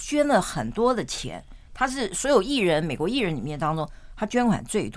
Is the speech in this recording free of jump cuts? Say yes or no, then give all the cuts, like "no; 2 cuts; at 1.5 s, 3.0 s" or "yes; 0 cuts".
yes; 0 cuts